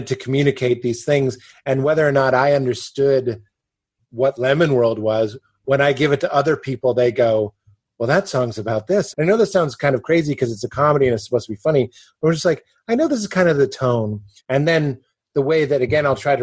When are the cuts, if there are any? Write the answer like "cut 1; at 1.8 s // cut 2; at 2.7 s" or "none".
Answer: cut 1; at 9.1 s // cut 2; at 14.4 s